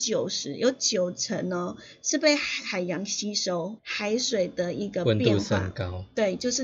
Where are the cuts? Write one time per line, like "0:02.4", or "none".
0:03.8